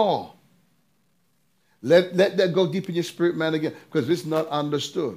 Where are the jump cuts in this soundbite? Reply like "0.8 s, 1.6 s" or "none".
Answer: none